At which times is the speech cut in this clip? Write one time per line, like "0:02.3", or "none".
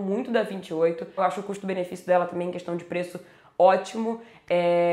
0:01.2